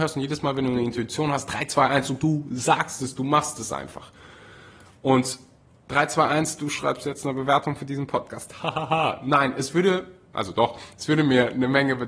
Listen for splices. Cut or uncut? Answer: uncut